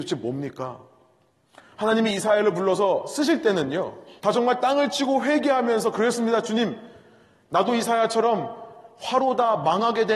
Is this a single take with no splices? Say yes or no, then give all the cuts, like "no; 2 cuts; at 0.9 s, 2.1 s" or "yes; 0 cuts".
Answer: no; 1 cut; at 4.2 s